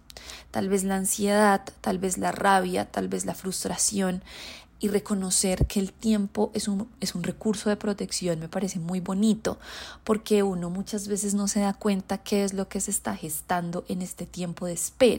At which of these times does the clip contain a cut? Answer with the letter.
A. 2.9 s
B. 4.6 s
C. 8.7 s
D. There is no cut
D